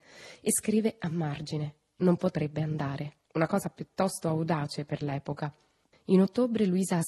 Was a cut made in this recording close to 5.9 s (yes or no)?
yes